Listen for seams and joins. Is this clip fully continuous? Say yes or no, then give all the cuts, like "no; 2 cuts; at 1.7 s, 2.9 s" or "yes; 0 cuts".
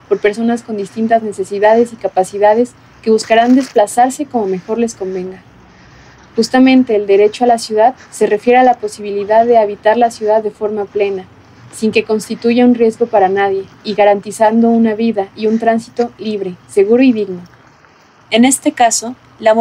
yes; 0 cuts